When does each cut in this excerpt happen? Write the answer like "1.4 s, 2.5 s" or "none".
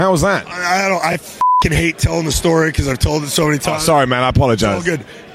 none